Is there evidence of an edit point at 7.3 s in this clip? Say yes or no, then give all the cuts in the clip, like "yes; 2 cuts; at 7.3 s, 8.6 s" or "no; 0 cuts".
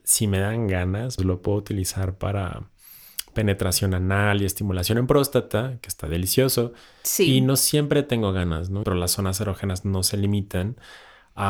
no; 2 cuts; at 1.2 s, 8.8 s